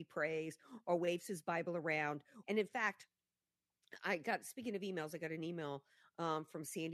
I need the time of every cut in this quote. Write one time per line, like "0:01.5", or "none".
0:02.4